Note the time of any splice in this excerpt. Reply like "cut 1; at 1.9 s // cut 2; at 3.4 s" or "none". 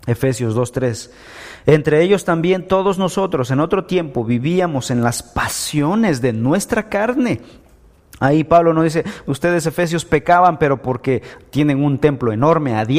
none